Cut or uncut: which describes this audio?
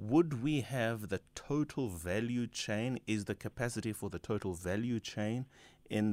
uncut